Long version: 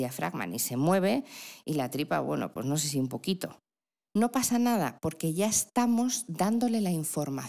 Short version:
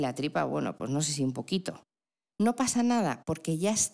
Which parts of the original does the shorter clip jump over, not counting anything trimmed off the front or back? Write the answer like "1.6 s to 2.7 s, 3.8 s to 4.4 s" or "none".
none